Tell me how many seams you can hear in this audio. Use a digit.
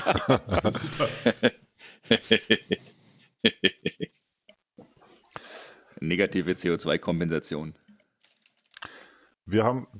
0